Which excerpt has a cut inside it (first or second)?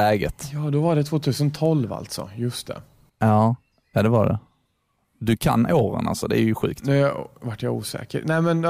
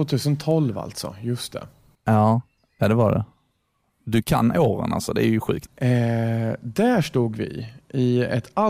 second